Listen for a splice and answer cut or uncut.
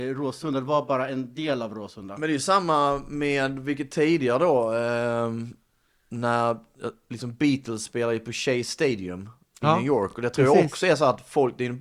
uncut